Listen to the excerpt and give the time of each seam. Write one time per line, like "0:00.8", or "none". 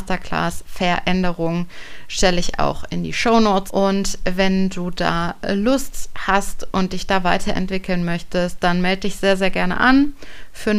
0:03.7